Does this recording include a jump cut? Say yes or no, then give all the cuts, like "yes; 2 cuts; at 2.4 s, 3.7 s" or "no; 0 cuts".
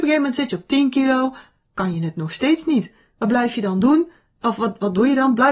no; 0 cuts